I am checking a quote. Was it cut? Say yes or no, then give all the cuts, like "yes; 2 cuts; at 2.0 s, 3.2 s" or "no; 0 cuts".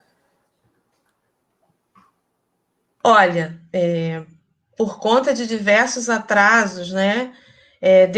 no; 0 cuts